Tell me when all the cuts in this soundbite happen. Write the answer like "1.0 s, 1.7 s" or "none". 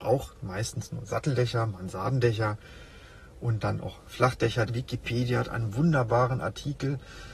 4.7 s